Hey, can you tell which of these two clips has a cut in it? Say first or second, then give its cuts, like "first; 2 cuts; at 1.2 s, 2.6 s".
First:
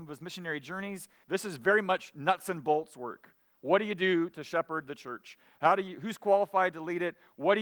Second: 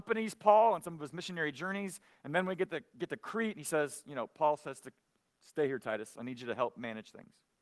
first; 1 cut; at 1.2 s